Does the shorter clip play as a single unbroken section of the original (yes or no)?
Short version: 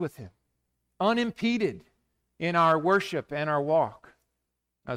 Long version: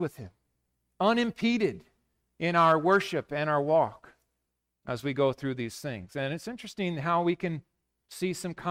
yes